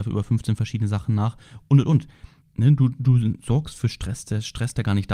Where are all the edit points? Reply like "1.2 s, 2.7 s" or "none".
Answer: 2.4 s